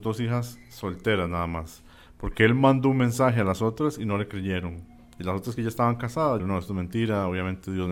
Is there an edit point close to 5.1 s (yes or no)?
no